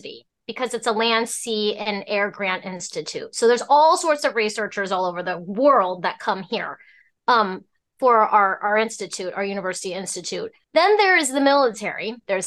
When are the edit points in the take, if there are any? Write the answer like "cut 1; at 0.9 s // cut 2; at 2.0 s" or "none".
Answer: none